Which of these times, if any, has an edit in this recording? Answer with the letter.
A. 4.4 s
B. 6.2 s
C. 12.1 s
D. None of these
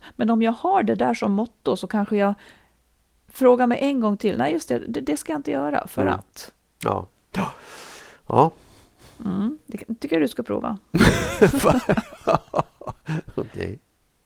D